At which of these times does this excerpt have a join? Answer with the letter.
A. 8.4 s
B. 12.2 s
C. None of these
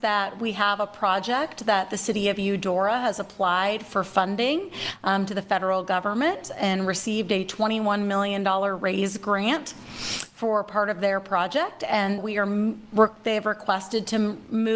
B